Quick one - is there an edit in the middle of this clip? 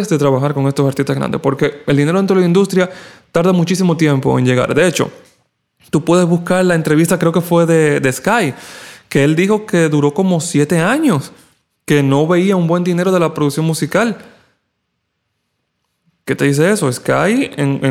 no; 0 cuts

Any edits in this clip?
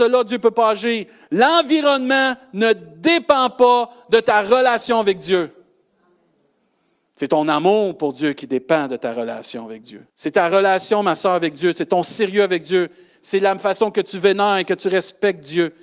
yes; 1 cut; at 10.1 s

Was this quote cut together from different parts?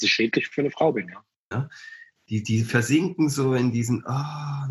yes; 1 cut; at 1.5 s

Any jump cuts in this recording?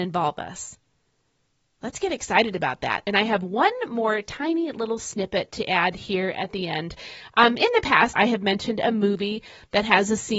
yes; 1 cut; at 8.1 s

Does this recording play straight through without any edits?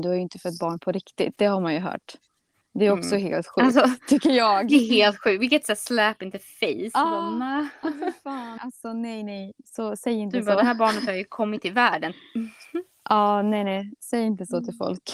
no; 1 cut; at 8.6 s

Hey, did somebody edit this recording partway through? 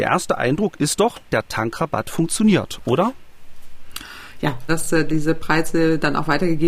yes; 1 cut; at 4.7 s

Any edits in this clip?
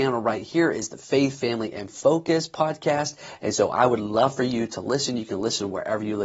no; 0 cuts

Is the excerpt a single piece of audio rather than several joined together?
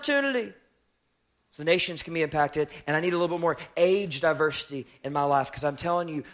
no; 1 cut; at 1.4 s

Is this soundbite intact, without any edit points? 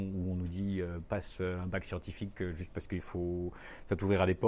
yes; 0 cuts

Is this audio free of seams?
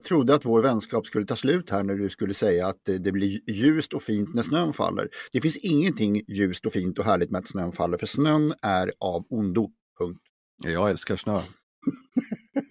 yes; 0 cuts

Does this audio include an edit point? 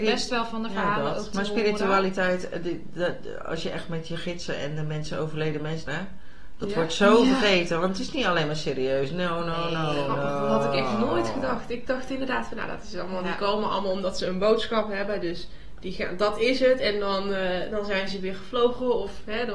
yes; 1 cut; at 5.9 s

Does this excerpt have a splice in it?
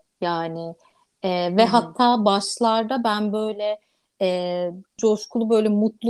yes; 1 cut; at 5.0 s

